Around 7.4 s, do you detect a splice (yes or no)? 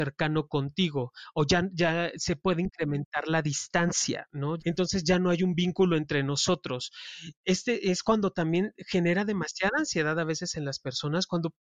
no